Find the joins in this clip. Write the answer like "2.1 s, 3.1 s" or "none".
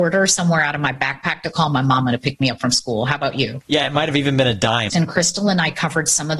3.6 s, 4.9 s